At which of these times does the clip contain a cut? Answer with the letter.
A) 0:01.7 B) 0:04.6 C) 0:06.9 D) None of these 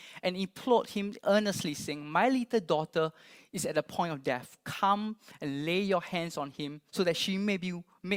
C